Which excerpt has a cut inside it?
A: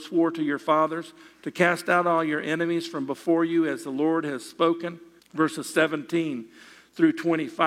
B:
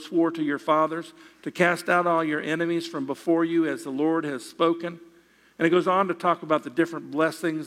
A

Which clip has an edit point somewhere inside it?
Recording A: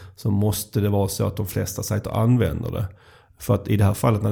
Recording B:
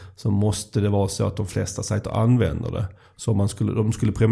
B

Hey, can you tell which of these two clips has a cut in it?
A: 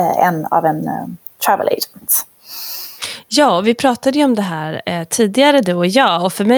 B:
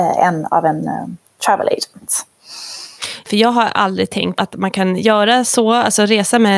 B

